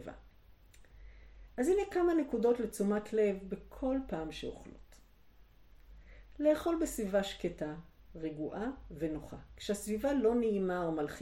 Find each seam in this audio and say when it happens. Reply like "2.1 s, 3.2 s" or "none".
none